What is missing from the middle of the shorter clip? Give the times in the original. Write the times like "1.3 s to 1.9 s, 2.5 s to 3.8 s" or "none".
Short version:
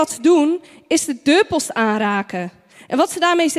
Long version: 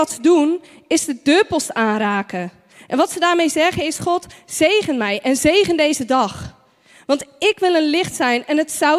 none